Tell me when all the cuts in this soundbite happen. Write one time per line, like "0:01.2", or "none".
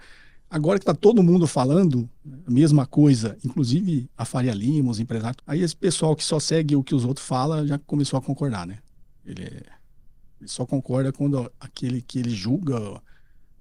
0:05.4